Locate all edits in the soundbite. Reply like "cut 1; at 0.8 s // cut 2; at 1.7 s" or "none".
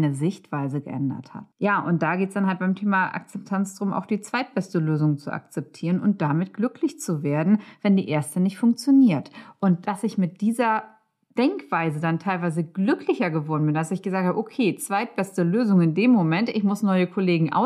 cut 1; at 1.5 s